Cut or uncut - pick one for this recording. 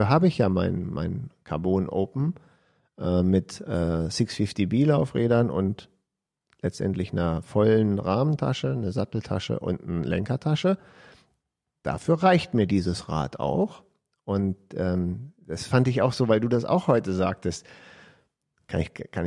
uncut